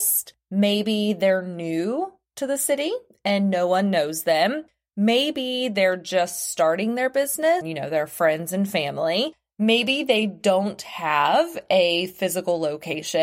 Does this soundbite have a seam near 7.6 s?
yes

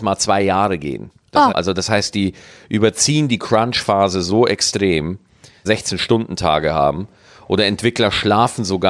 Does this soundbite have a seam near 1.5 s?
yes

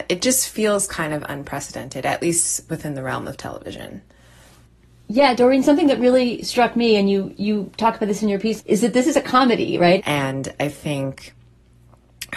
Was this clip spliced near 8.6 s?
yes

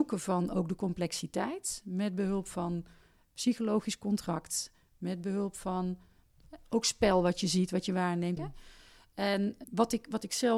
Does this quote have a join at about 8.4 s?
yes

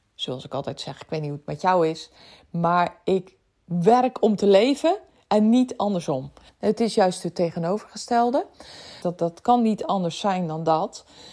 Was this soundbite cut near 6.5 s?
yes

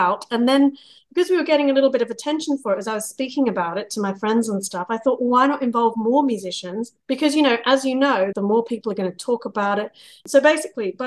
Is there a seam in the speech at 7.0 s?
yes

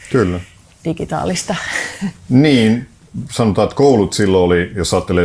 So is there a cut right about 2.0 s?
no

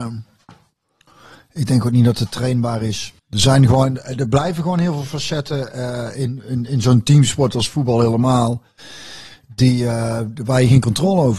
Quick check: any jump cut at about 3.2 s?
yes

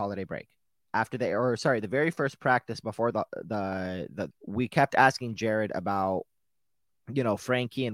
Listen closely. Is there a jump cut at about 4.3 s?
yes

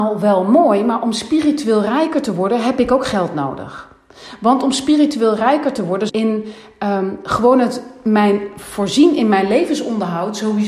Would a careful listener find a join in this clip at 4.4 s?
no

